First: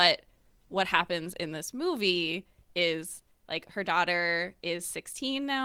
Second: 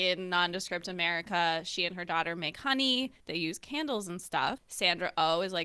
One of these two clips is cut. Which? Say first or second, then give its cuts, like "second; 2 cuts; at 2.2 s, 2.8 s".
second; 2 cuts; at 3.2 s, 4.6 s